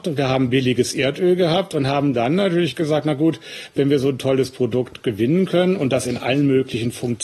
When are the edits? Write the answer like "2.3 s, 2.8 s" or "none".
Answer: none

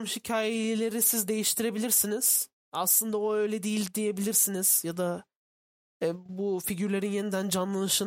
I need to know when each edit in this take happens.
none

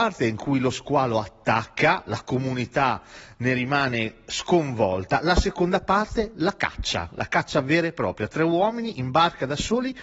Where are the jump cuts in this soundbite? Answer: none

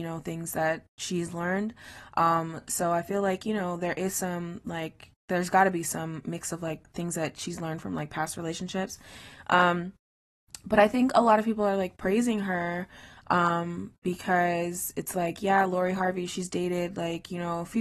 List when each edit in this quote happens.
none

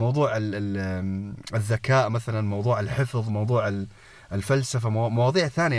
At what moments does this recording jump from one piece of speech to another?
none

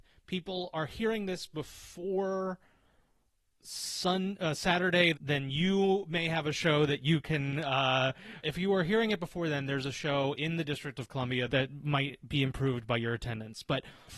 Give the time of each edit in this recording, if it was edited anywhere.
5.1 s, 8.4 s

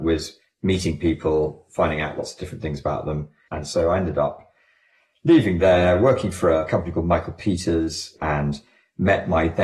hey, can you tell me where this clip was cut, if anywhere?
3.5 s, 8.2 s

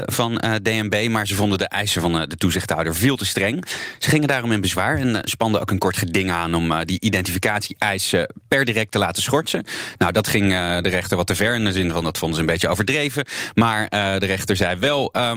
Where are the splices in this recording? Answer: none

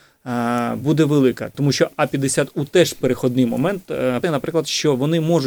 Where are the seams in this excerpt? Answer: 1.5 s, 4.2 s

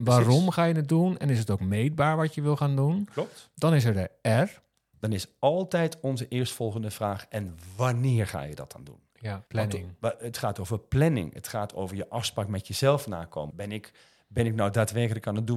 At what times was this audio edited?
4.9 s, 9.5 s, 13.5 s

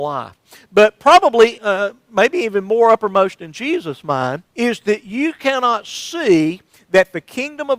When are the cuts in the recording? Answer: 1.6 s, 4.5 s

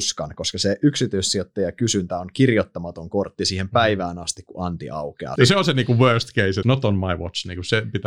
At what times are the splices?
5.4 s, 6.6 s

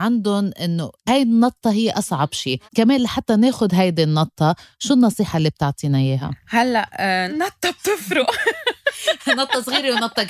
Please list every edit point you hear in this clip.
2.7 s, 7.3 s

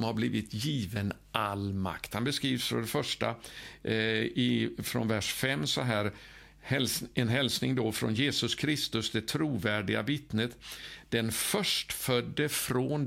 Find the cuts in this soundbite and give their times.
none

